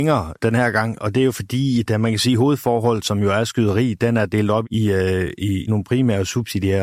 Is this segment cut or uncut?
cut